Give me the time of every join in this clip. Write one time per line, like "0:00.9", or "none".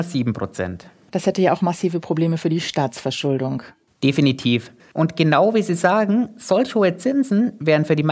0:01.1
0:04.8